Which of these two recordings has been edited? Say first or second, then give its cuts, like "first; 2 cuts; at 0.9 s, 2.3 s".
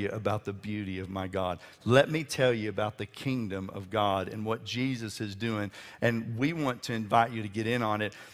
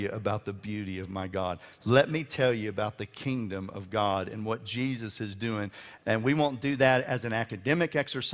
second; 1 cut; at 6.0 s